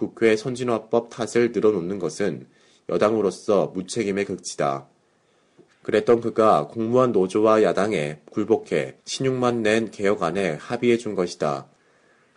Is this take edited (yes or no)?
yes